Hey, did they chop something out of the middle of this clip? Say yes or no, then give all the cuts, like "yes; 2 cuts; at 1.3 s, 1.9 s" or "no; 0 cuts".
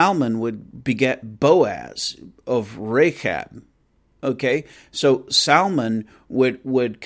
no; 0 cuts